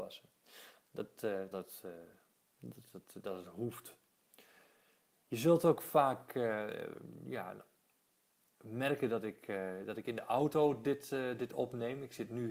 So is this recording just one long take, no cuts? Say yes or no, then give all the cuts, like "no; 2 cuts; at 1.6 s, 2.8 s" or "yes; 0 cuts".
no; 1 cut; at 1.5 s